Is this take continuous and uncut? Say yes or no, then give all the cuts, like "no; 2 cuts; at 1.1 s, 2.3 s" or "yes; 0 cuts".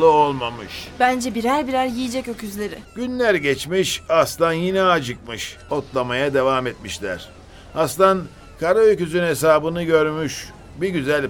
no; 2 cuts; at 2.8 s, 5.7 s